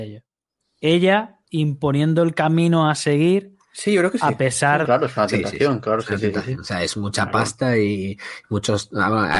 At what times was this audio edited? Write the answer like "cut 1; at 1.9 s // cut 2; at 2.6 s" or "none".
cut 1; at 4.9 s